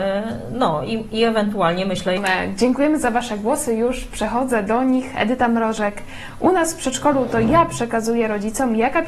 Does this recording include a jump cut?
no; 0 cuts

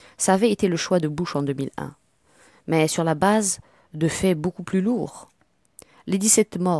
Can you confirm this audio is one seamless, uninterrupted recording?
yes; 0 cuts

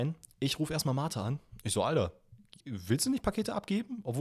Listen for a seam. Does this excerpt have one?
no; 0 cuts

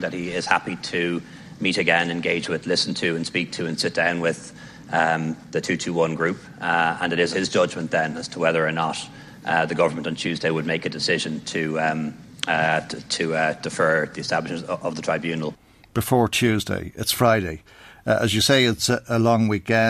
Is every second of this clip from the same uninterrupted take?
no; 1 cut; at 7.3 s

